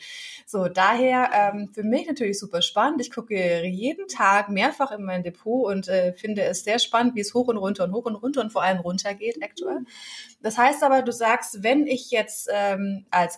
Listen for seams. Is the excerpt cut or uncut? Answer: uncut